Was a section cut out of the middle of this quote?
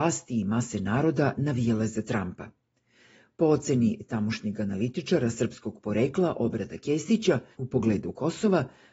yes; 1 cut; at 7.5 s

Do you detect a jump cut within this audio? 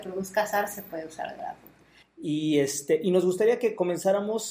yes; 1 cut; at 2.0 s

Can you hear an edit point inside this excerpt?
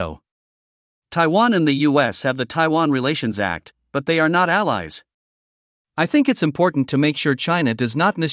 no; 0 cuts

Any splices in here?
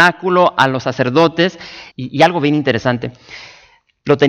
yes; 1 cut; at 1.9 s

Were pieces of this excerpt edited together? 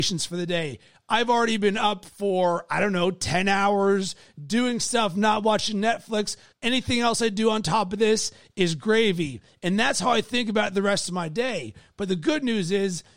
yes; 1 cut; at 6.5 s

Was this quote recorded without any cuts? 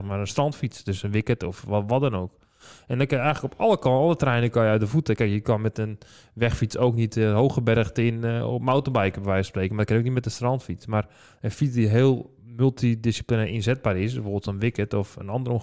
yes; 0 cuts

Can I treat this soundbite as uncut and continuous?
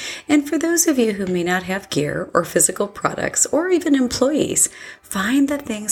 yes; 0 cuts

